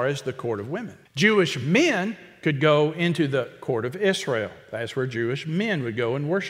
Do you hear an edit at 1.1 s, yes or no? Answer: yes